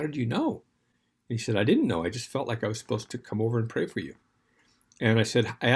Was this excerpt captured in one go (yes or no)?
yes